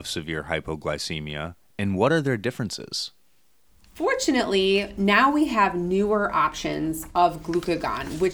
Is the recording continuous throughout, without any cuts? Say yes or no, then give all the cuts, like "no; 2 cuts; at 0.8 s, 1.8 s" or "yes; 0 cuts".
yes; 0 cuts